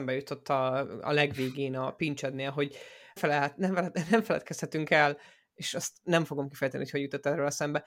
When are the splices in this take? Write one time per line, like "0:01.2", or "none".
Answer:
0:03.2